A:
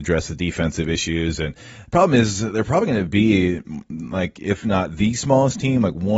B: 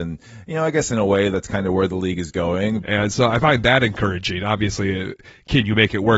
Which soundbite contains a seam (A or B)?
B